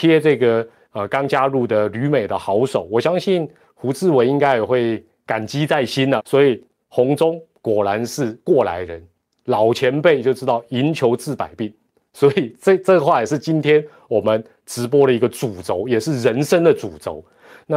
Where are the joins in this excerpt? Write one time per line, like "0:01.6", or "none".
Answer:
0:06.2